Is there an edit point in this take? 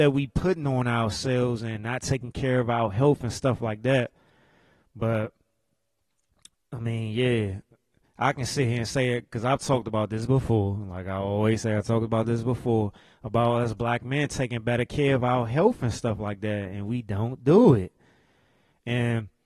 no; 0 cuts

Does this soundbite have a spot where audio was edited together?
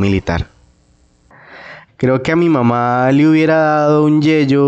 yes; 1 cut; at 1.9 s

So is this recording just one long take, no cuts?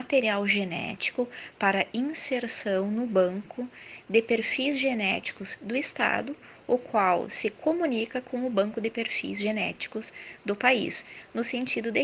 yes; 0 cuts

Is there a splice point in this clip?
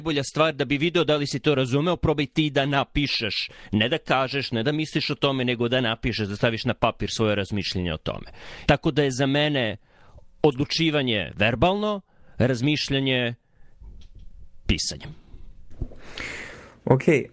yes; 1 cut; at 8.7 s

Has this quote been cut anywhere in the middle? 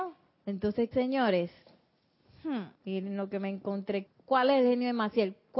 yes; 3 cuts; at 0.9 s, 2.7 s, 4.1 s

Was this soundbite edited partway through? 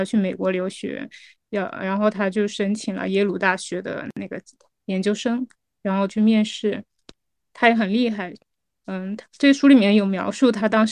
no; 0 cuts

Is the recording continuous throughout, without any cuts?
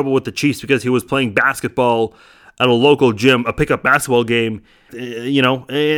no; 1 cut; at 4.9 s

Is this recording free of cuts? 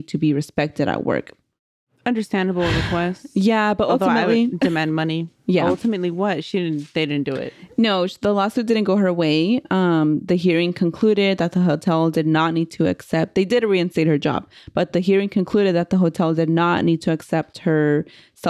yes; 0 cuts

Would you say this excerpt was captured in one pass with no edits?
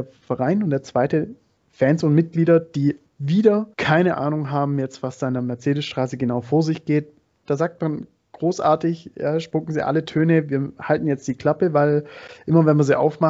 no; 2 cuts; at 3.7 s, 7.4 s

